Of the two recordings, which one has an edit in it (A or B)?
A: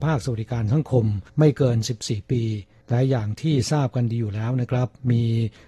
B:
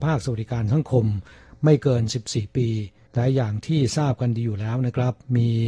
A